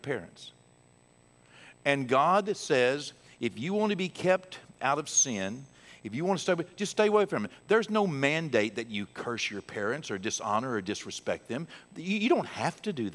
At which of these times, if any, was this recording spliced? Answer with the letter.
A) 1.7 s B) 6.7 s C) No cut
C